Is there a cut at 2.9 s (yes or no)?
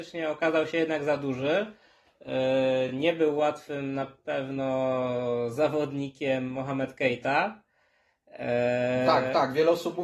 no